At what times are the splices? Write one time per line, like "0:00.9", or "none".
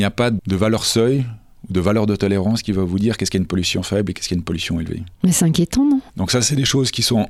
0:06.1

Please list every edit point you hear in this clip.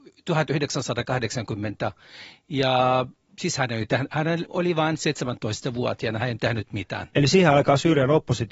0:04.5

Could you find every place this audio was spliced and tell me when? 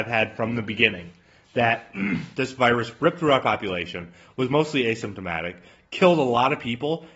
none

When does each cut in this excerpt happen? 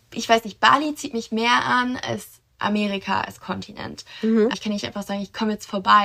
0:04.5

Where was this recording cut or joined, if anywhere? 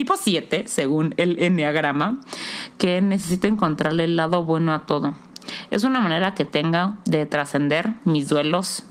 none

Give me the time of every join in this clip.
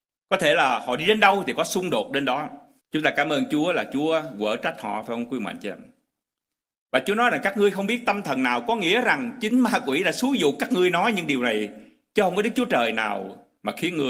0:02.8

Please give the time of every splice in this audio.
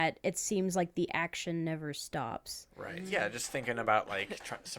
none

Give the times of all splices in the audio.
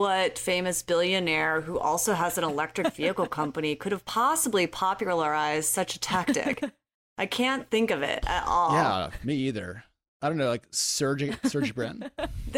none

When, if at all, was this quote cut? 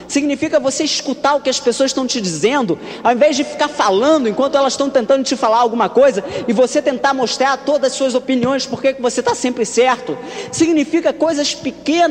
none

